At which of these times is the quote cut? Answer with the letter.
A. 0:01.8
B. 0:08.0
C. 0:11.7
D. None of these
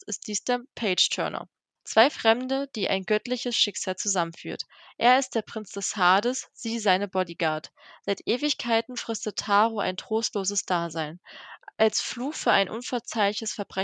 A